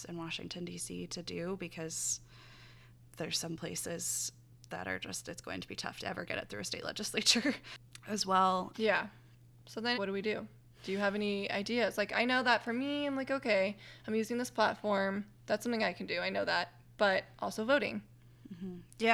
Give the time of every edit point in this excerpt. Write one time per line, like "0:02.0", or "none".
0:08.7
0:09.9